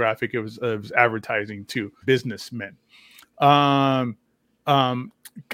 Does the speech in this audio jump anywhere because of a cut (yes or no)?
yes